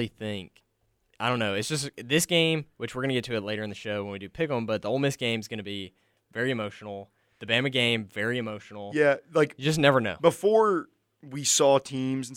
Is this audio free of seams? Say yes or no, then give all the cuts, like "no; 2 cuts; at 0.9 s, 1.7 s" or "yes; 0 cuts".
yes; 0 cuts